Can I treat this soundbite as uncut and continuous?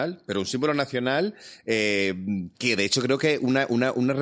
no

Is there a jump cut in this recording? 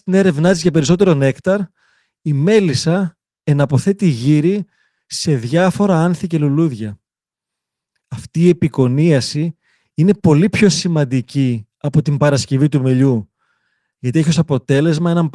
no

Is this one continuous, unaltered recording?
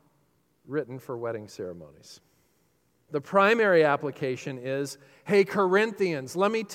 no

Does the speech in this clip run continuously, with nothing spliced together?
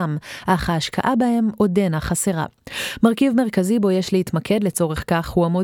yes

